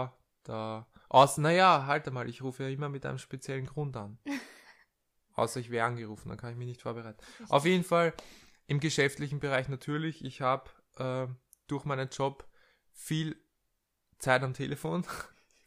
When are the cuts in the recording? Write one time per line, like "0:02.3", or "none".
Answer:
none